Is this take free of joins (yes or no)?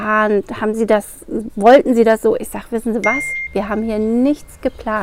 no